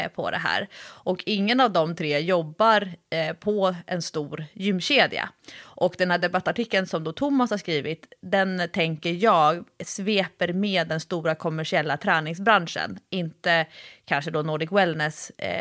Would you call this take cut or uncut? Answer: uncut